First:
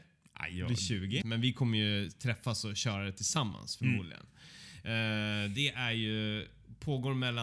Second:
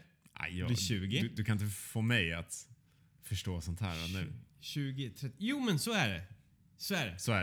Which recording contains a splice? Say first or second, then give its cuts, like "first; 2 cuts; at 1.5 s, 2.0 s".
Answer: first; 1 cut; at 1.2 s